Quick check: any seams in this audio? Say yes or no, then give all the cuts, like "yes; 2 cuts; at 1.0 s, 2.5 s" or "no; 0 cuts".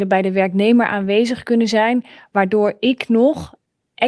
no; 0 cuts